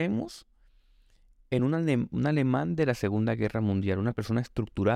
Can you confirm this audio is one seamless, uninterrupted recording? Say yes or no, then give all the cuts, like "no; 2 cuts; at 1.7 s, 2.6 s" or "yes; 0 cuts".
yes; 0 cuts